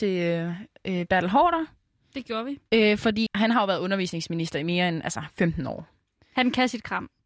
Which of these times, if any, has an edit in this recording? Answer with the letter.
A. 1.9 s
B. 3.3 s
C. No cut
B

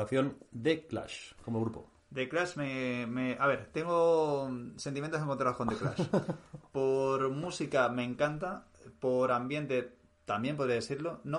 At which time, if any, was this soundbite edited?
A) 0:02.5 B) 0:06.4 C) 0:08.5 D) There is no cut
D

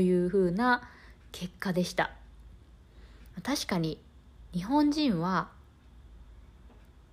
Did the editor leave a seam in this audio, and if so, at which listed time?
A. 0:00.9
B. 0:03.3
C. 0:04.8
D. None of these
B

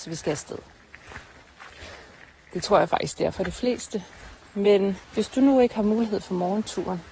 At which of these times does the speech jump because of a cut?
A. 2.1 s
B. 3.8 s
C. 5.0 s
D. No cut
C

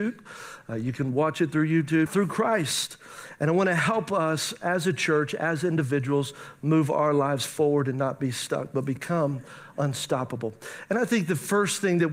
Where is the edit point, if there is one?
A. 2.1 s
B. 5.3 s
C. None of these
A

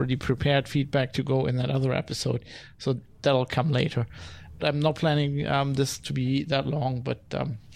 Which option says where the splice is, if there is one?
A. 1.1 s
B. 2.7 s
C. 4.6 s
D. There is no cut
C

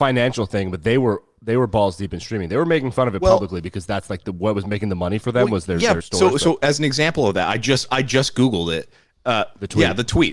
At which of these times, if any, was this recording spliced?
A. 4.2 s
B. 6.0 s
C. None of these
B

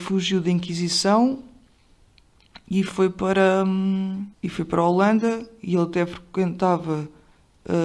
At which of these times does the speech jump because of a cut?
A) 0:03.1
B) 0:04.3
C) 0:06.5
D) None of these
B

